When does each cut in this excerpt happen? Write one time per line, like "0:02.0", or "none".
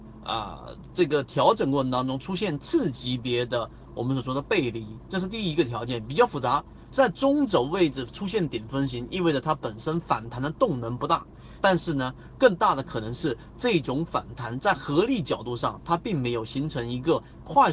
0:06.9
0:11.6

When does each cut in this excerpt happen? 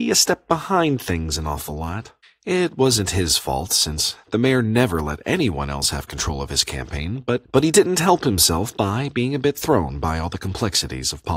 none

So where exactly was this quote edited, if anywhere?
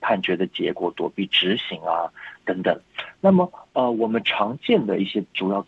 none

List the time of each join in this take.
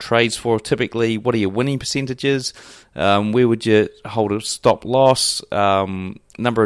none

